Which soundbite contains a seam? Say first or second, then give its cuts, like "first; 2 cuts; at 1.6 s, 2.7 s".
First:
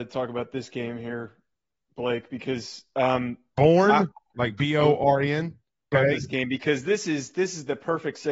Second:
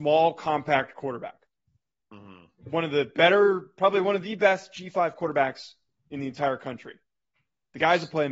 first; 1 cut; at 5.9 s